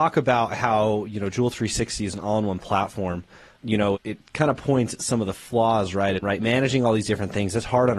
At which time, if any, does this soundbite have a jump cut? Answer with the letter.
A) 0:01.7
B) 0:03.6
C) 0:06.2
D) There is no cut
C